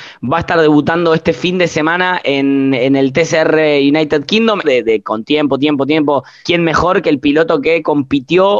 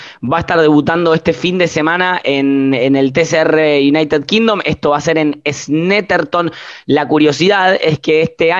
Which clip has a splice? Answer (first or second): first